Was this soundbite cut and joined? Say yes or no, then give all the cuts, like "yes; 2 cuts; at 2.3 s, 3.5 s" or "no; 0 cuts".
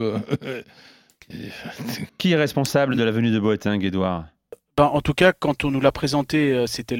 yes; 1 cut; at 2.1 s